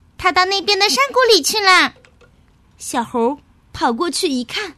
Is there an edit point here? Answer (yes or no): yes